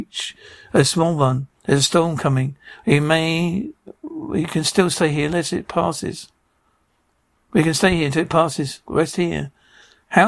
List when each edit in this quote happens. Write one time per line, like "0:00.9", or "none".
0:08.8